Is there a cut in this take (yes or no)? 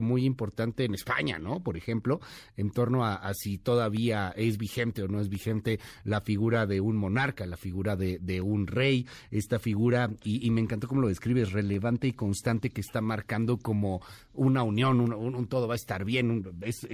no